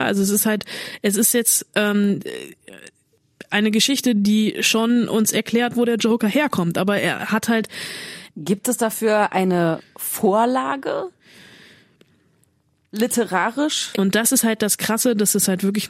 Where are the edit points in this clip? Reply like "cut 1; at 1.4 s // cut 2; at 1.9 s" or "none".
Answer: cut 1; at 8.3 s // cut 2; at 13.9 s